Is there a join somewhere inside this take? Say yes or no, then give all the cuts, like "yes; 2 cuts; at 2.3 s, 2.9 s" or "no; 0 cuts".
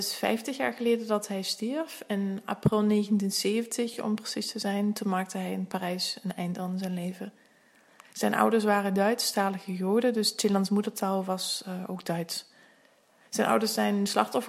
no; 0 cuts